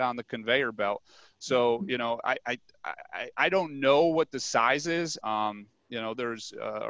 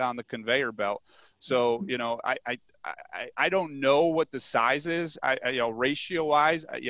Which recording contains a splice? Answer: first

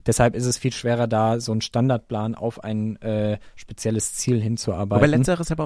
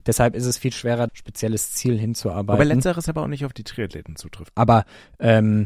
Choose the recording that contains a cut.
second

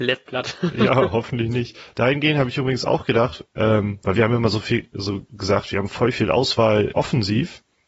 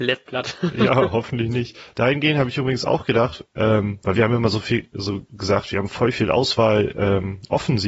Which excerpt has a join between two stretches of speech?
first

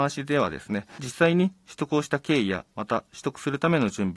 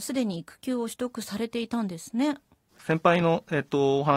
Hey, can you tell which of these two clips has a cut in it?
second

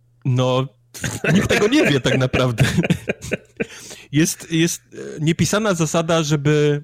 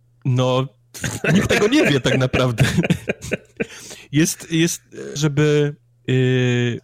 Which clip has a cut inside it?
second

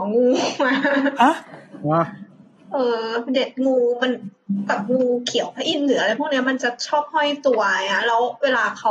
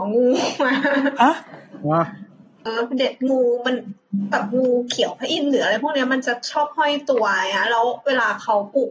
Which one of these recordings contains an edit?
second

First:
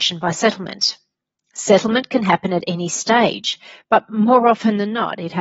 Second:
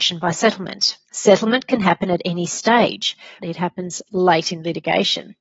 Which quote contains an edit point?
second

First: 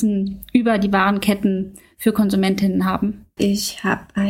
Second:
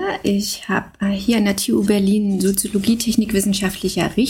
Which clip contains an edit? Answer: first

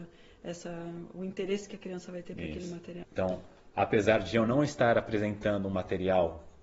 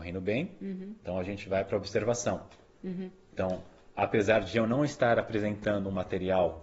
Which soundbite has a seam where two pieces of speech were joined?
first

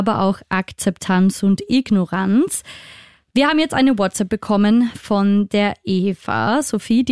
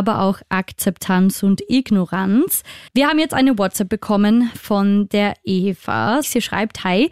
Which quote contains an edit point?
second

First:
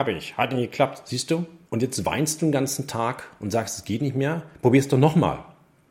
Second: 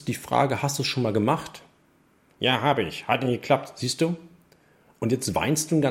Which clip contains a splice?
first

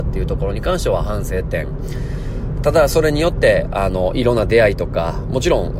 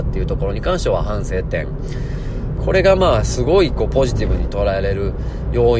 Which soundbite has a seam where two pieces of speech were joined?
second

